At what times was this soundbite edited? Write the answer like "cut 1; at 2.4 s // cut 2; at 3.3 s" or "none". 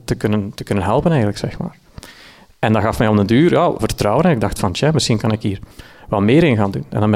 cut 1; at 3.8 s